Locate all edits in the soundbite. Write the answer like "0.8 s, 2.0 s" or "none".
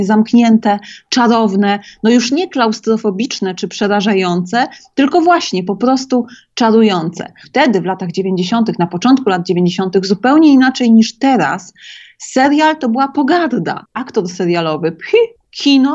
7.4 s